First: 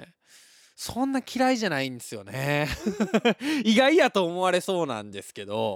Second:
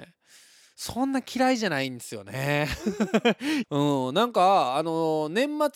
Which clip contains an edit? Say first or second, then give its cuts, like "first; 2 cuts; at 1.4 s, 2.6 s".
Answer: second; 1 cut; at 3.6 s